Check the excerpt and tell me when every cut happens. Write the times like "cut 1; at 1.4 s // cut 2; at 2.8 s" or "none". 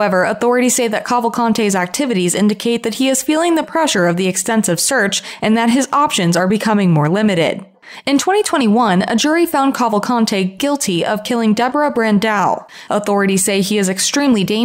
none

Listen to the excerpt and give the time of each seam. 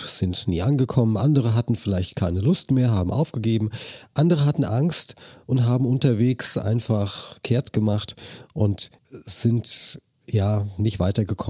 cut 1; at 9.0 s

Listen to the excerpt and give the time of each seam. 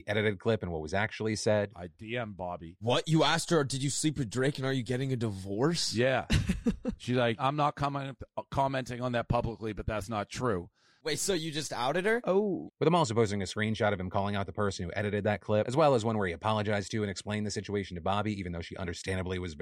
cut 1; at 12.7 s

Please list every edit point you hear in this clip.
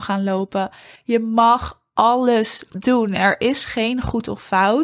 cut 1; at 1.0 s

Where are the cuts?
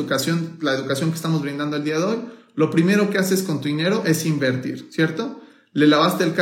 none

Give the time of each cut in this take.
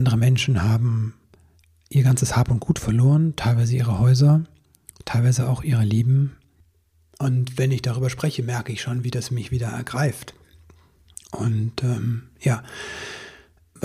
none

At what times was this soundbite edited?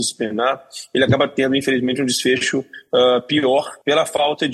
none

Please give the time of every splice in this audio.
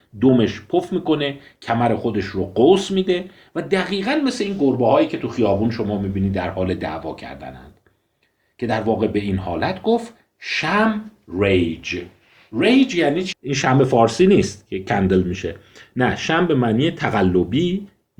cut 1; at 13.3 s

